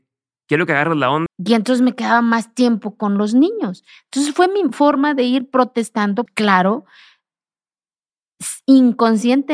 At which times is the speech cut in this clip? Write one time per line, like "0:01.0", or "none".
0:01.3
0:06.3